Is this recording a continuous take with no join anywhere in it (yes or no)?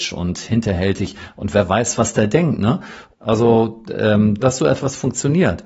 no